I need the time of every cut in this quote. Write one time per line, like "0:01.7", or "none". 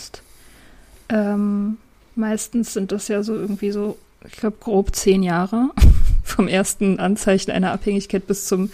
none